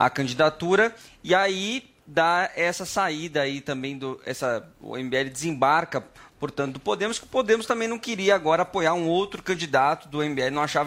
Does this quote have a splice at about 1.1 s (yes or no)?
no